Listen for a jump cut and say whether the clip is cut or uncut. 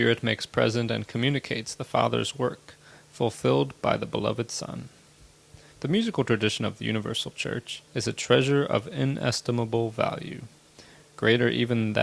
cut